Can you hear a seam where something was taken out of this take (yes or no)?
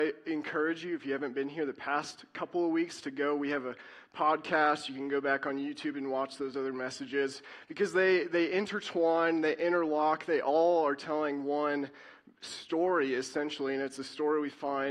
no